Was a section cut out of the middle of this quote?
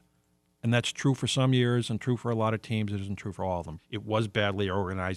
yes; 1 cut; at 3.8 s

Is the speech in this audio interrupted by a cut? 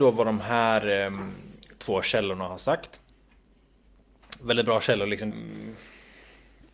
yes; 1 cut; at 5.3 s

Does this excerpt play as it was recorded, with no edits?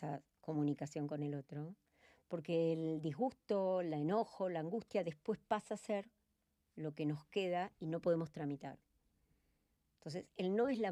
yes; 0 cuts

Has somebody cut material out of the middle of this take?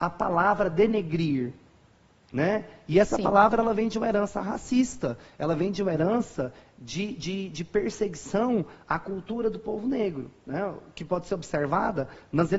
no; 0 cuts

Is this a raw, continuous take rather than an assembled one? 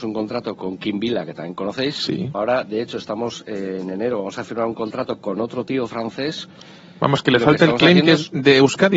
no; 1 cut; at 2.3 s

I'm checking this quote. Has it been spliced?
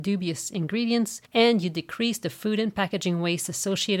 yes; 1 cut; at 1.3 s

